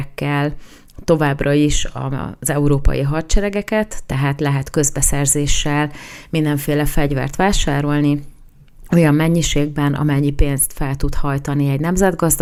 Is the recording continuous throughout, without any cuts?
yes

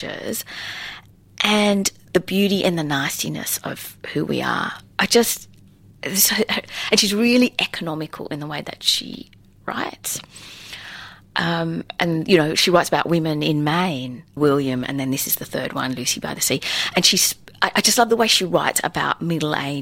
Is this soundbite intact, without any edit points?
no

